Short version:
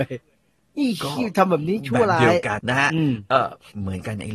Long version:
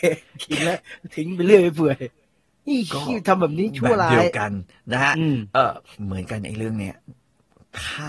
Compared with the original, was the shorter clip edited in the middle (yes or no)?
yes